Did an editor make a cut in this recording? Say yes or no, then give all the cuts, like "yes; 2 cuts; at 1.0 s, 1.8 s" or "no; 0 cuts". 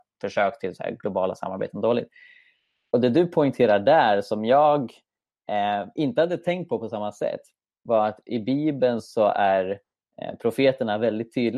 no; 0 cuts